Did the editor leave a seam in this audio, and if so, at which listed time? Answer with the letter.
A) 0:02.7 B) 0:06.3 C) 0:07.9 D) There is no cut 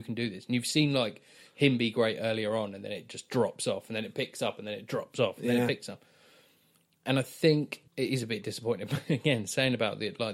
C